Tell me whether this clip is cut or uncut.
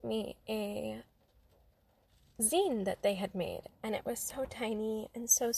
uncut